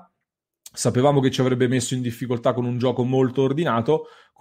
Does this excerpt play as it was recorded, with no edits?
yes; 0 cuts

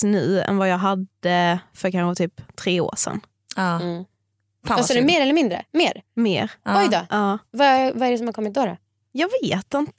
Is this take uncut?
yes; 0 cuts

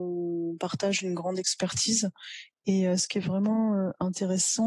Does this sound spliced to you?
no; 0 cuts

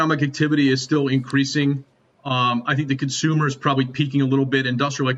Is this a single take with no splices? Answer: yes; 0 cuts

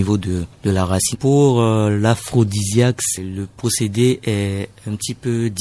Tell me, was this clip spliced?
yes; 1 cut; at 1.1 s

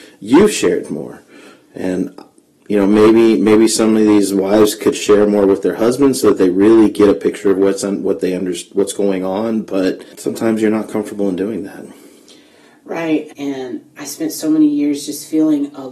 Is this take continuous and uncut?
no; 1 cut; at 13.3 s

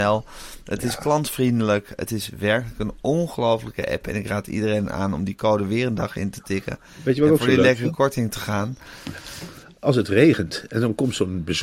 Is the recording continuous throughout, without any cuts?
yes; 0 cuts

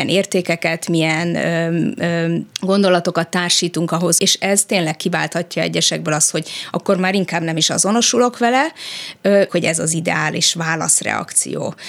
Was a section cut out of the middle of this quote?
yes; 3 cuts; at 2.5 s, 4.2 s, 9.5 s

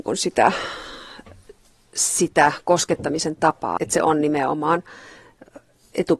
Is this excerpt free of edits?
no; 1 cut; at 3.8 s

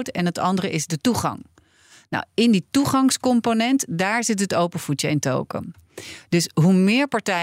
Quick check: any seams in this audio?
no; 0 cuts

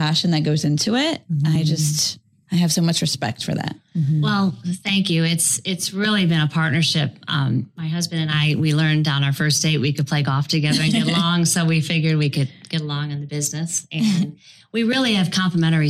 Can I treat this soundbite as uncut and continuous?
yes; 0 cuts

